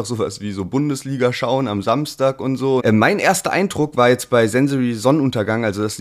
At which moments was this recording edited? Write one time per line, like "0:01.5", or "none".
0:02.8